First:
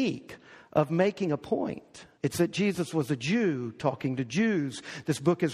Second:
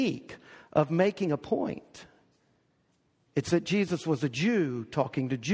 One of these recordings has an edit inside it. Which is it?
first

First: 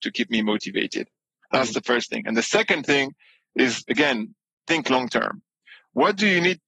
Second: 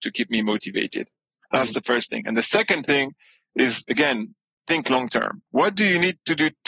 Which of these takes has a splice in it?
second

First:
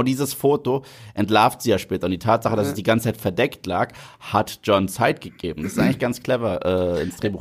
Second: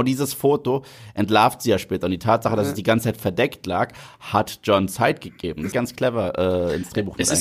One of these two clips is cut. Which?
second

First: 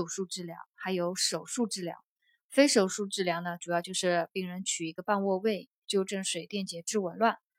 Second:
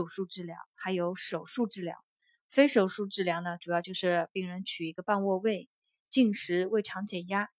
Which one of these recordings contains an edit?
first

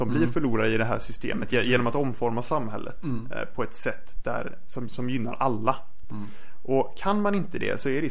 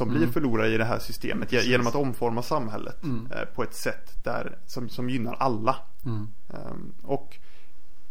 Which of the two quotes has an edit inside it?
second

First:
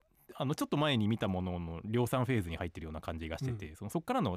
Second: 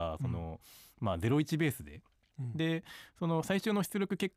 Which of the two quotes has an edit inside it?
second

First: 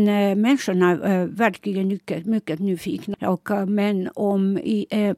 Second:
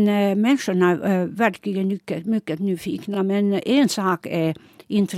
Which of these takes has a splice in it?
first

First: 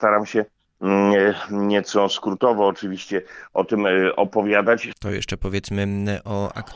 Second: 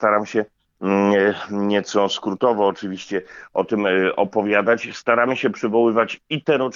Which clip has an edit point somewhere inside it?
first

